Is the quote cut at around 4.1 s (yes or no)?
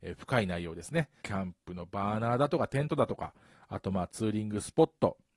no